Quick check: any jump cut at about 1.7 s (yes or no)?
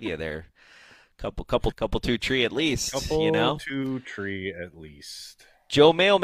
yes